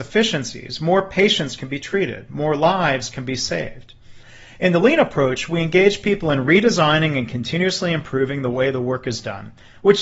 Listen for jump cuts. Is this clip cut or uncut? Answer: uncut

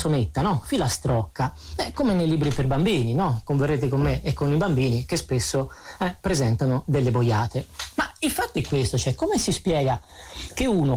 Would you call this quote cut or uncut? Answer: uncut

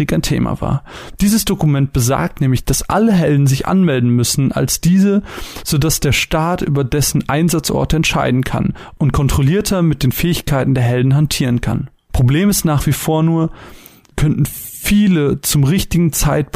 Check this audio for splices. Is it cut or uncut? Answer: cut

